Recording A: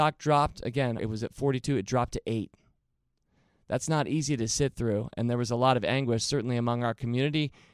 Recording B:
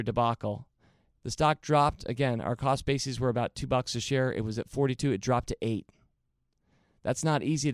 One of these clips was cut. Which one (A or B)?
A